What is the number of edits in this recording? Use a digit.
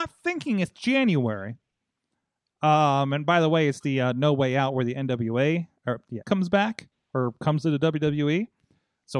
1